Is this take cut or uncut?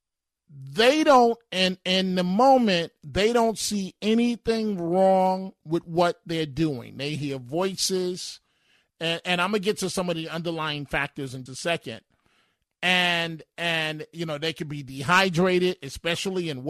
cut